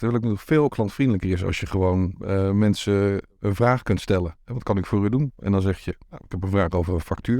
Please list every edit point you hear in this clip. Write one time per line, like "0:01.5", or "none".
0:03.3